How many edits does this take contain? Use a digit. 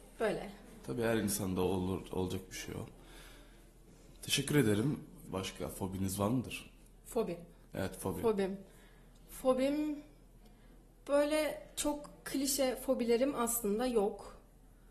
1